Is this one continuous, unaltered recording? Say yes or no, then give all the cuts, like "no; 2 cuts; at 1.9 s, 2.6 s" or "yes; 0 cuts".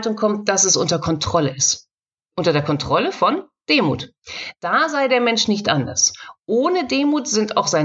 yes; 0 cuts